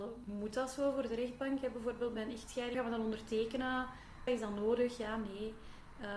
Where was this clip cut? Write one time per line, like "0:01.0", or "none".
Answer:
0:02.7
0:04.3